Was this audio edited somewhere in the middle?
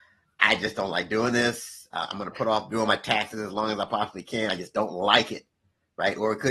no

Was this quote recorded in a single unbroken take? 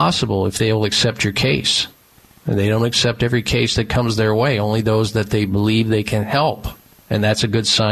yes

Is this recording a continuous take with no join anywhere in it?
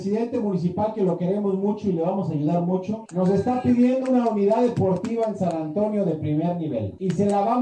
yes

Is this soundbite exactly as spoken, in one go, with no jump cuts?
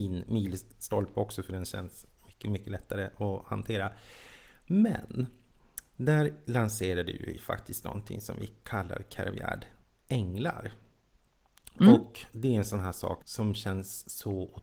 no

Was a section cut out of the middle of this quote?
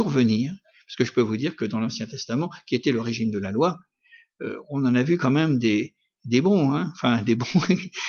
no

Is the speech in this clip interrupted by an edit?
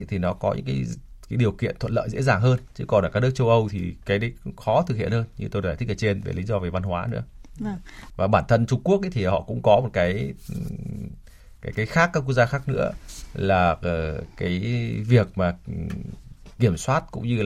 yes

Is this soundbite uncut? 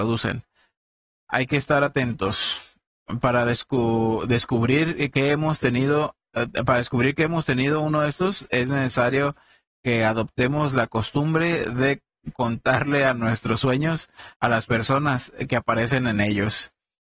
yes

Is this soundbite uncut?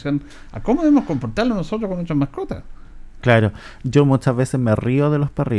yes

